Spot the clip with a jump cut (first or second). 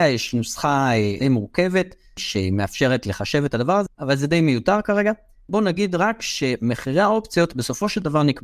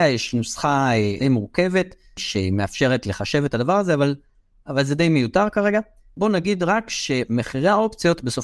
first